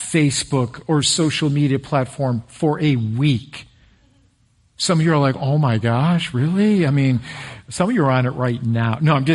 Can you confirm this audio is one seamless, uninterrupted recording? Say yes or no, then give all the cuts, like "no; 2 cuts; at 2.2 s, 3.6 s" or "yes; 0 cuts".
yes; 0 cuts